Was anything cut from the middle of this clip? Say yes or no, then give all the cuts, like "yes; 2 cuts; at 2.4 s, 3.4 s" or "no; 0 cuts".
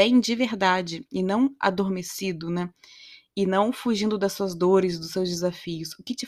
no; 0 cuts